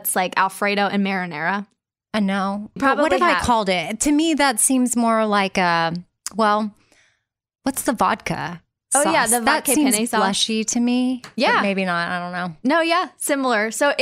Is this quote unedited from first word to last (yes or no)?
no